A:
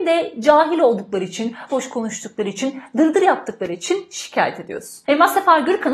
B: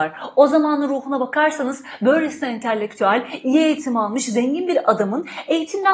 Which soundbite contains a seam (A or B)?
A